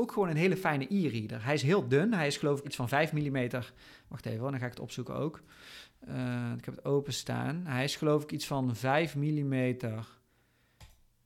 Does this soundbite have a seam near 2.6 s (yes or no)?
yes